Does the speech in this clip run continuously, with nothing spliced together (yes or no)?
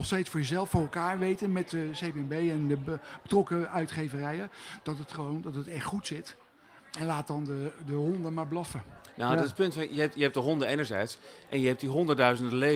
yes